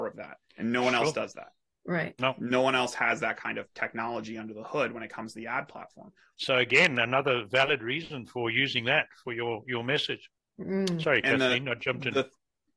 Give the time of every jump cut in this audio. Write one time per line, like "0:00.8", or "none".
0:06.3